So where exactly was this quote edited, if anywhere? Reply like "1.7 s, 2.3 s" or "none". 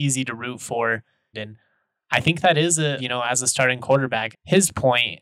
1.3 s, 3.0 s, 4.3 s